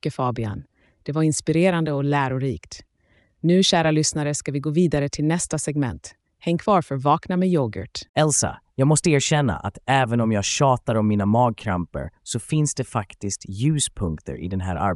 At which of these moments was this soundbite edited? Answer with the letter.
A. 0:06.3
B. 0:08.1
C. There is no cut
B